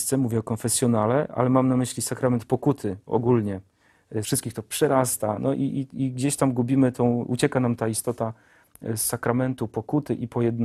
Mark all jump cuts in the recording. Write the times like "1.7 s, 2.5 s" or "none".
4.2 s